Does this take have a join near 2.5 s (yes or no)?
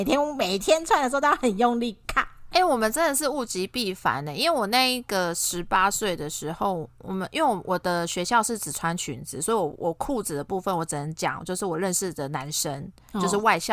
yes